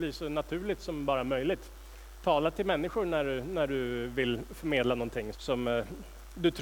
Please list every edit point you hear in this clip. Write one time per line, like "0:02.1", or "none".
0:05.3